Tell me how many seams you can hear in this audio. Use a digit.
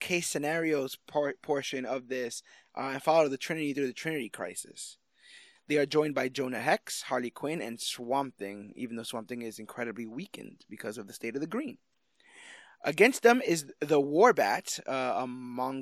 1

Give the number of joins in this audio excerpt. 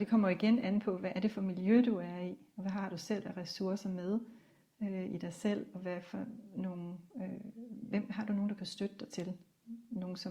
0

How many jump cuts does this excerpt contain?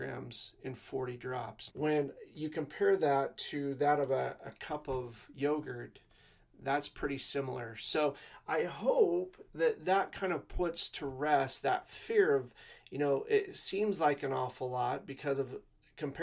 1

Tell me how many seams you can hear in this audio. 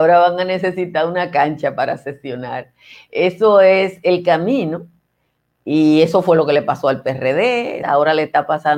2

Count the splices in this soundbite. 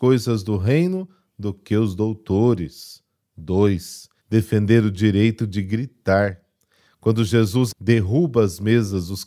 2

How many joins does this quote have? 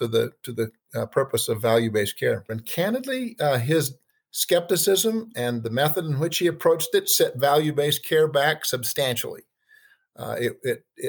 1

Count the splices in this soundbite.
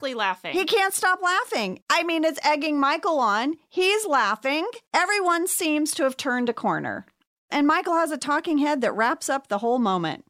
2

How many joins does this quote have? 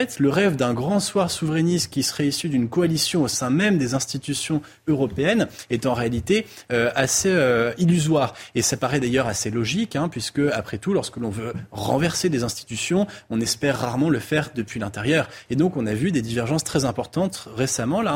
1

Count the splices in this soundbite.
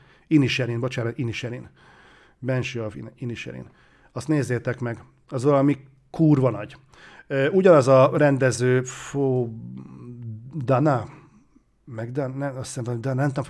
0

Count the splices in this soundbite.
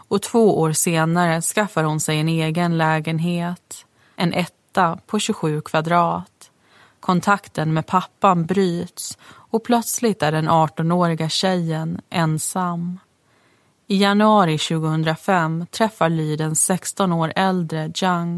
0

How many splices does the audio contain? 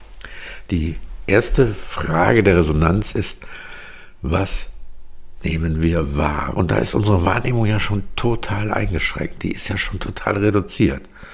1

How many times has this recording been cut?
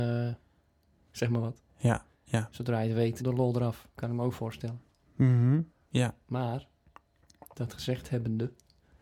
3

